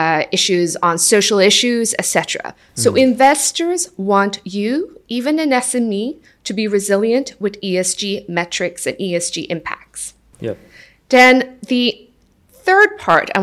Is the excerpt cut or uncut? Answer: uncut